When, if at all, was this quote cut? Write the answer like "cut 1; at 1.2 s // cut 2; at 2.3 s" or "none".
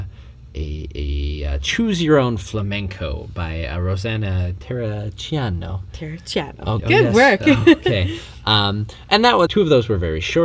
cut 1; at 6.8 s // cut 2; at 9.5 s